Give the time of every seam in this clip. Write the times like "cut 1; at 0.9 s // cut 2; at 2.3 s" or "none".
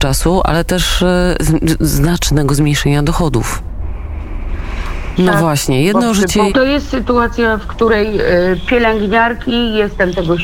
cut 1; at 1.4 s // cut 2; at 5.2 s // cut 3; at 6.5 s